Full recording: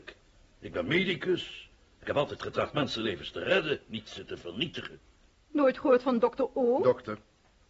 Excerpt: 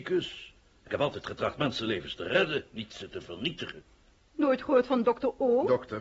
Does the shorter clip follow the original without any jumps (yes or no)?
yes